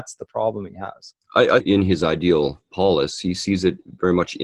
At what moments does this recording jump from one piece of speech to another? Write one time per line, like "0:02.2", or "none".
0:01.6